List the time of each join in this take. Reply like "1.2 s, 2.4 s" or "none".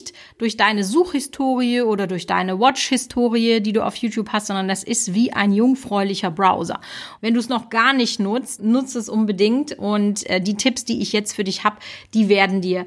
7.2 s, 8.6 s